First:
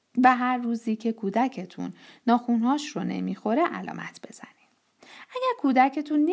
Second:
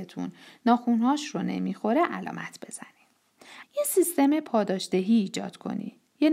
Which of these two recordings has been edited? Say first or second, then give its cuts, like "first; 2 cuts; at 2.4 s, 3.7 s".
second; 1 cut; at 3.6 s